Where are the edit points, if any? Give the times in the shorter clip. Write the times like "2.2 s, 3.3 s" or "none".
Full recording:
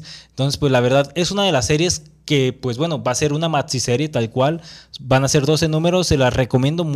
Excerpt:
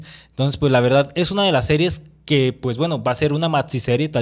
none